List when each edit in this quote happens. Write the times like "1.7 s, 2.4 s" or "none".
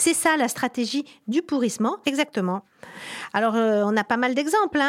2.0 s